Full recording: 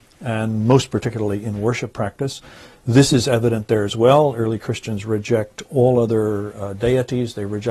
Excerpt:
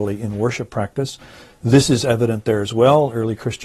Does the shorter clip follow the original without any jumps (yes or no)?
yes